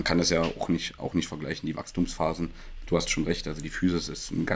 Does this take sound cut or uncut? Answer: uncut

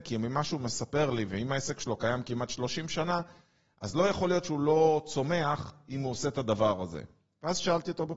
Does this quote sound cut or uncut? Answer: uncut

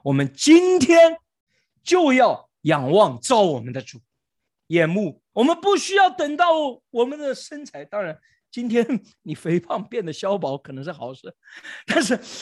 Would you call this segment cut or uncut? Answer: cut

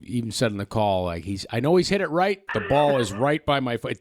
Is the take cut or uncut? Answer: cut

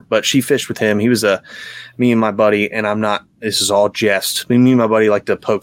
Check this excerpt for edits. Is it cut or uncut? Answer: uncut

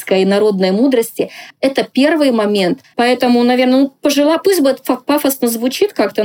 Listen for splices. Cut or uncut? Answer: cut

